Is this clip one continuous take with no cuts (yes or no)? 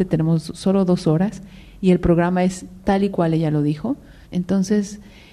no